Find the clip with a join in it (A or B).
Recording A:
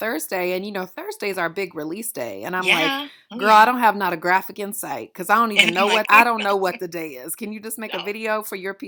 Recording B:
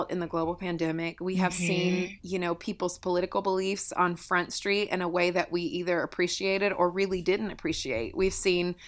A